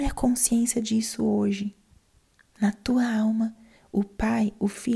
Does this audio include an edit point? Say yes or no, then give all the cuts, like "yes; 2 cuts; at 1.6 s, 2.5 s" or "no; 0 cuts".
no; 0 cuts